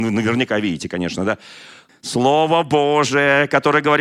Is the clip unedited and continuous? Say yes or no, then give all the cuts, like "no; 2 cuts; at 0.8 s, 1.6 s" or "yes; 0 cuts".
no; 1 cut; at 1.9 s